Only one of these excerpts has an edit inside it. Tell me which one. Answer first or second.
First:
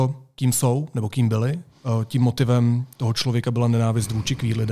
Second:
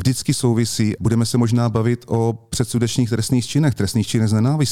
second